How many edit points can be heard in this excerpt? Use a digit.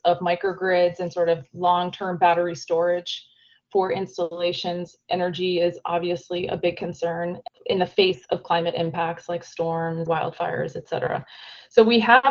1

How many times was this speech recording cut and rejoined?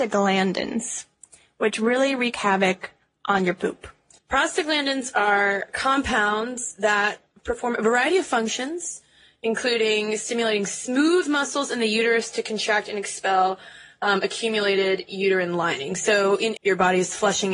2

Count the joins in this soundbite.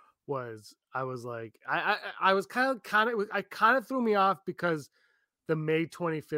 0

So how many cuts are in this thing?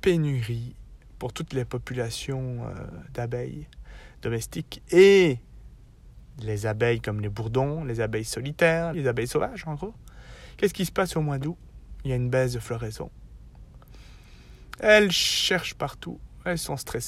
1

